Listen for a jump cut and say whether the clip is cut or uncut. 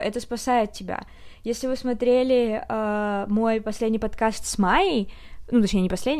uncut